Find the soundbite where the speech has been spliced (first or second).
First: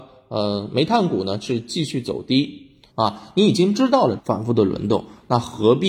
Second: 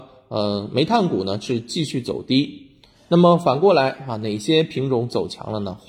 first